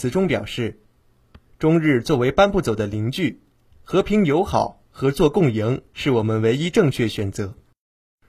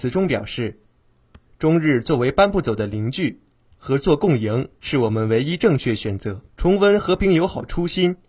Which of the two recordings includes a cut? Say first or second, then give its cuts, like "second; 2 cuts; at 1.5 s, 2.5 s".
second; 2 cuts; at 3.7 s, 6.5 s